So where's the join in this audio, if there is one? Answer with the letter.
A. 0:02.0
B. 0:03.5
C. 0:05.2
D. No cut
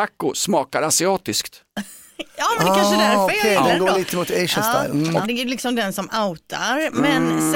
C